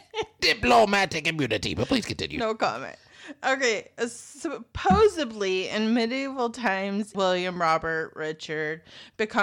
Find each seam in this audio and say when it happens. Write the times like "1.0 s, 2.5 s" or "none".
7.1 s